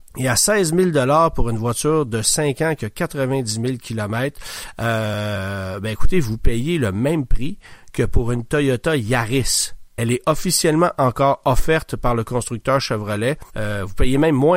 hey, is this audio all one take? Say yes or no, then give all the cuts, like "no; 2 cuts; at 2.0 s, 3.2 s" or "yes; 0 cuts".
no; 2 cuts; at 9.9 s, 13.5 s